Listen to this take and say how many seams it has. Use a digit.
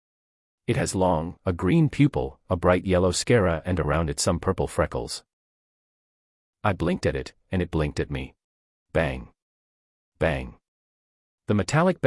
2